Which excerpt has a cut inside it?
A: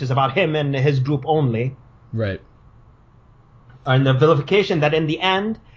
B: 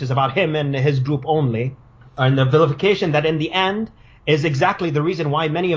B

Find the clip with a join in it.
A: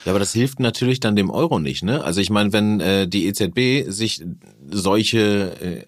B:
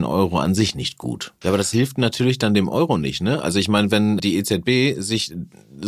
B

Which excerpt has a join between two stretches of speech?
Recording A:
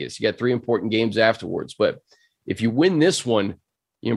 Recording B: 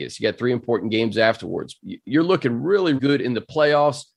B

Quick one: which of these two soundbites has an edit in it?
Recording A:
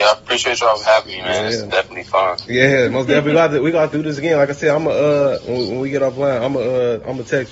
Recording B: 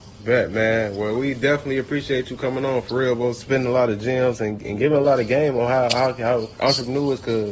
B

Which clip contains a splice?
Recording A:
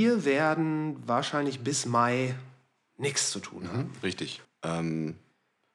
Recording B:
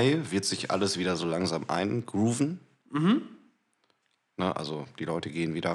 A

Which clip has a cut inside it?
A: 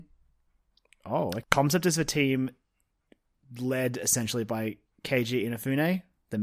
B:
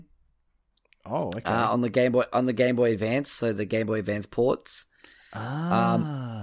A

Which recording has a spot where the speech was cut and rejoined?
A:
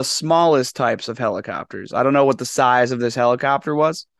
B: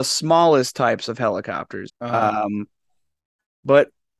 B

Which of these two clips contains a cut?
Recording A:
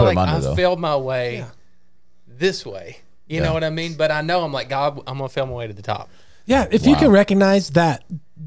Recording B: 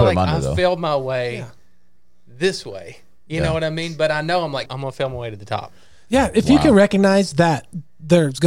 B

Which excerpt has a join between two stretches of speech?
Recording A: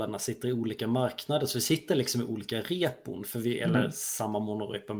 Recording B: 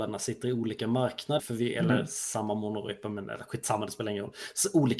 B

